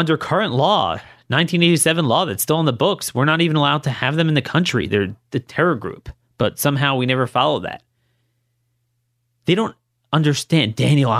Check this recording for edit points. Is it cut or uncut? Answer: uncut